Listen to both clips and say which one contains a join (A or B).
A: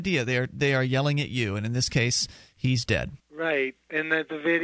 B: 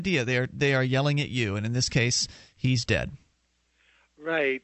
A